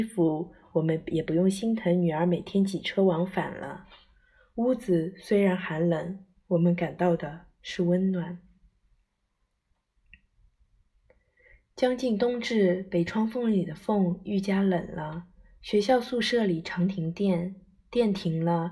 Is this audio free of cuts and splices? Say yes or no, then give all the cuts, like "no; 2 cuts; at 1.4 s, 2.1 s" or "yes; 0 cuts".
yes; 0 cuts